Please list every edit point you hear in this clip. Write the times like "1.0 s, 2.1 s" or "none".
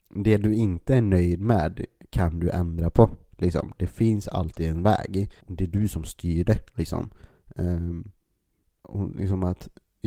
5.4 s

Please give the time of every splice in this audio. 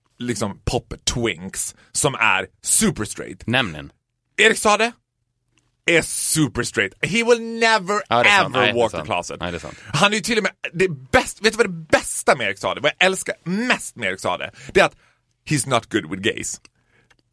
none

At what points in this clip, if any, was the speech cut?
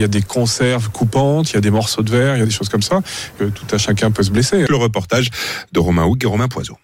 3.4 s, 4.7 s

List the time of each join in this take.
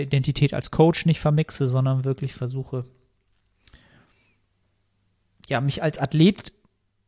none

